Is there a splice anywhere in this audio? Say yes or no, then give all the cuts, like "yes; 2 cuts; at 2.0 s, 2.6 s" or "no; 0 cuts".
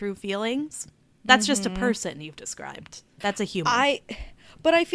yes; 1 cut; at 3.2 s